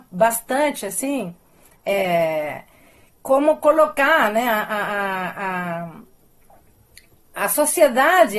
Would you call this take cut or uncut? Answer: uncut